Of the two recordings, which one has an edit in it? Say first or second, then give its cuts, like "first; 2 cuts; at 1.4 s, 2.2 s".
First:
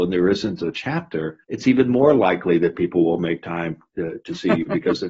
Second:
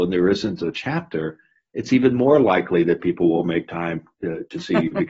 first; 1 cut; at 1.4 s